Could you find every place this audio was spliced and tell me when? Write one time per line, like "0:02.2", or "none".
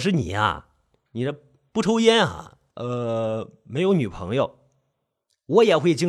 0:02.7